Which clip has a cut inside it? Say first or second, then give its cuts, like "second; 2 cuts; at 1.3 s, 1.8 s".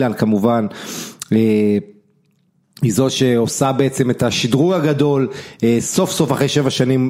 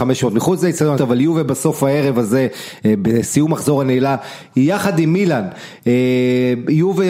second; 2 cuts; at 1.0 s, 4.5 s